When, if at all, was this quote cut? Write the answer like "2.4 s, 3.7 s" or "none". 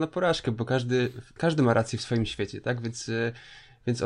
1.4 s